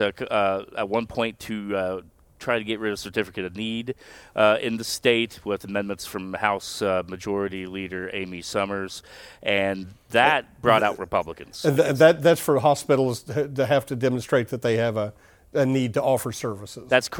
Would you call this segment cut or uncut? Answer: uncut